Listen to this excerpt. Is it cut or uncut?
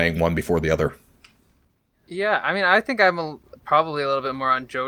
uncut